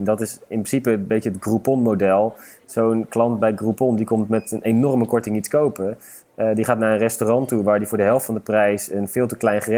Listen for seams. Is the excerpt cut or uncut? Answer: uncut